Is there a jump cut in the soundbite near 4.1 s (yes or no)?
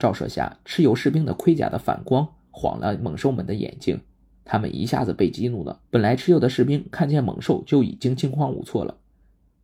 no